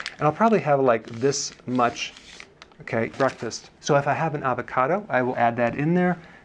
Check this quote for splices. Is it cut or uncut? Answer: cut